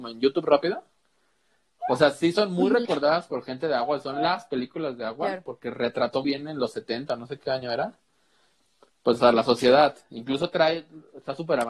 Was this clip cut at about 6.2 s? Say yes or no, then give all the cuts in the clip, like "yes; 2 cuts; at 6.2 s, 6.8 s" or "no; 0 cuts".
yes; 1 cut; at 6.2 s